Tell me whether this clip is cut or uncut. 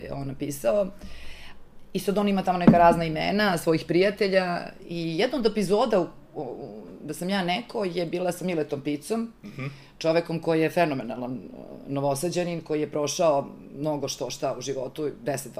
uncut